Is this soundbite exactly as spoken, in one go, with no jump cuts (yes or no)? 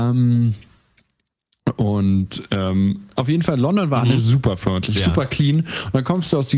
yes